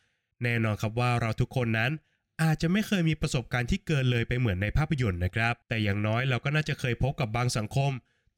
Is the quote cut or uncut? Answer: cut